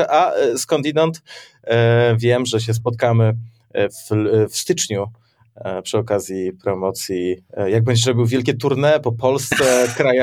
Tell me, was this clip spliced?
no; 0 cuts

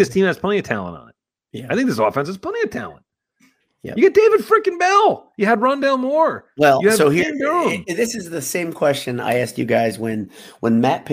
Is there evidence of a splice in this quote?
no; 0 cuts

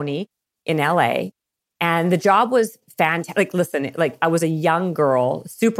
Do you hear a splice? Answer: no; 0 cuts

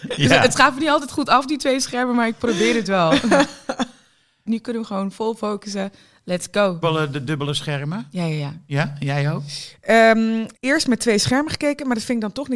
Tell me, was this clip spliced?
yes; 3 cuts; at 4.5 s, 6.8 s, 10.5 s

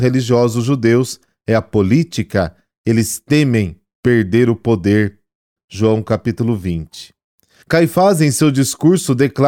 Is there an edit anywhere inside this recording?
yes; 2 cuts; at 5.6 s, 7.6 s

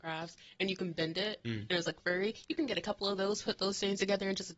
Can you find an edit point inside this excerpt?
no; 0 cuts

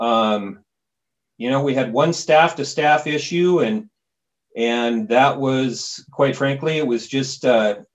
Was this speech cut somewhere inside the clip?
no; 0 cuts

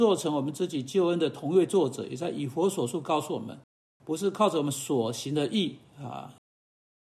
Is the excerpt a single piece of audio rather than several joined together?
yes; 0 cuts

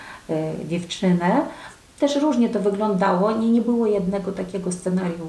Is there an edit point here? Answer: no; 0 cuts

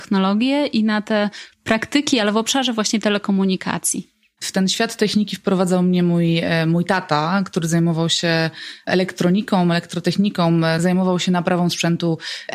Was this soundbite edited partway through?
yes; 1 cut; at 4.4 s

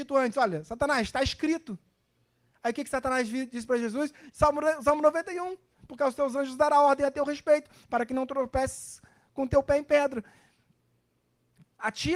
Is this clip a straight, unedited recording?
no; 1 cut; at 4.3 s

